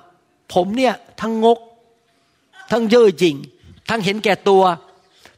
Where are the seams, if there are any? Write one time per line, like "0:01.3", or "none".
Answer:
none